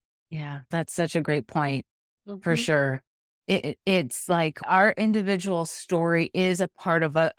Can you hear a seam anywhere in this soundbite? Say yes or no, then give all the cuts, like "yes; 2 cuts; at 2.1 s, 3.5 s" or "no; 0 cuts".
no; 0 cuts